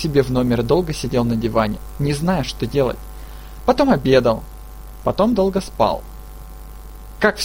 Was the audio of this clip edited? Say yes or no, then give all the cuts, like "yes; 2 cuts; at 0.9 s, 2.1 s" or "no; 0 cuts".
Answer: no; 0 cuts